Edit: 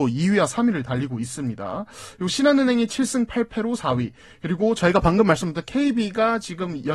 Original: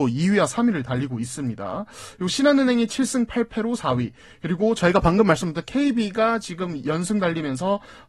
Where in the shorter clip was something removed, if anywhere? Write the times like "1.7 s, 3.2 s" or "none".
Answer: none